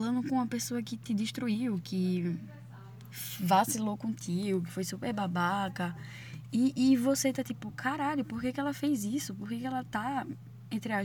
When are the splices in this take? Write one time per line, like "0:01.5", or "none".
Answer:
0:01.8